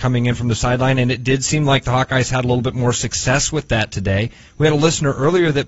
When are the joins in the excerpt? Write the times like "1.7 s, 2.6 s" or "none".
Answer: none